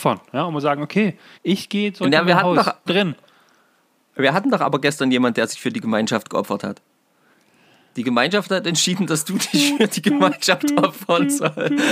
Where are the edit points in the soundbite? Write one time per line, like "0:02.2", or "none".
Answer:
0:01.3
0:02.9